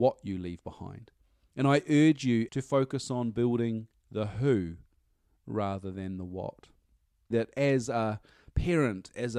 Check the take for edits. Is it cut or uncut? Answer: cut